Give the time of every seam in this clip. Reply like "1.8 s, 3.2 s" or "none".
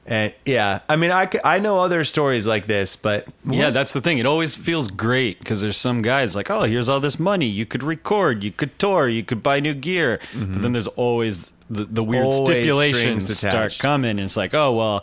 none